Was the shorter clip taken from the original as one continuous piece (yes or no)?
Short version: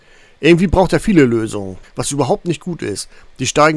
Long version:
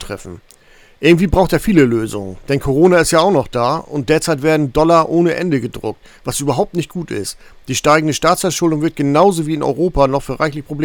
no